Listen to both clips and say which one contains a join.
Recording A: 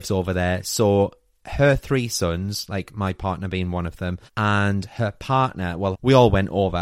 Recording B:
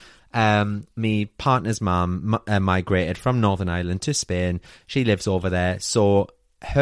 A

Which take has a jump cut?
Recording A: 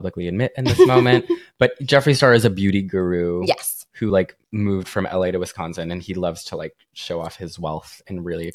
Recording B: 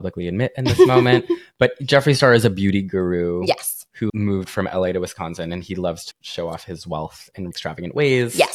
B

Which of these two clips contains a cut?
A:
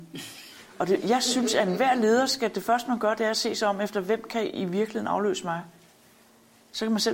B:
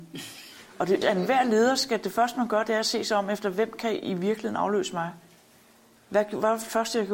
B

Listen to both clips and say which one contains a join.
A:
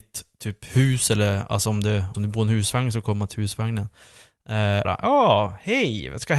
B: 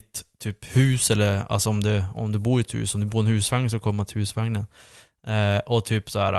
A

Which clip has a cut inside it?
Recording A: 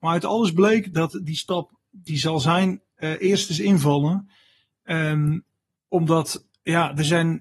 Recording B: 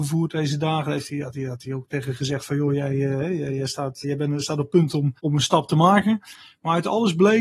B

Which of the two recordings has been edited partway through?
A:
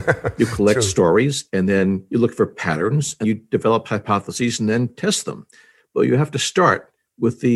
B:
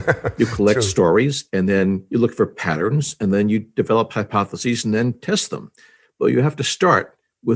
A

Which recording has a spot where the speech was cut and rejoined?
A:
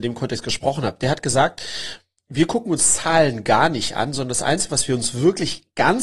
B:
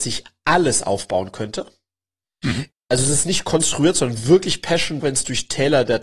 B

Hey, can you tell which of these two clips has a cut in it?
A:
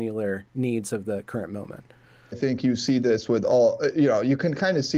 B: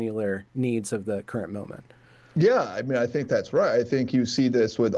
A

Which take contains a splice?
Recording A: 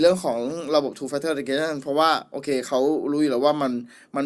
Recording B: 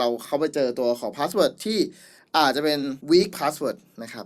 B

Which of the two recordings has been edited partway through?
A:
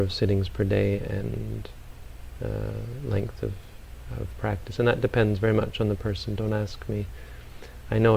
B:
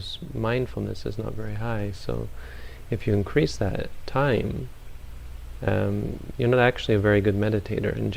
B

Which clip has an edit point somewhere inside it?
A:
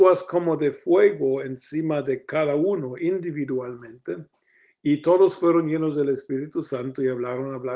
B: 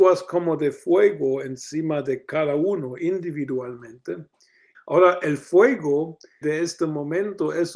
B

